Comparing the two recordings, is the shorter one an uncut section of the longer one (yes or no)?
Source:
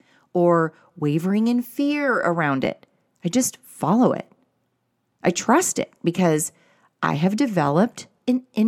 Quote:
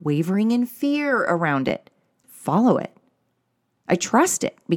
no